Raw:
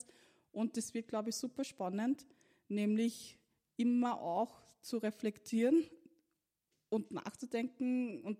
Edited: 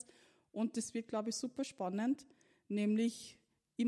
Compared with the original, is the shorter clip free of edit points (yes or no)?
yes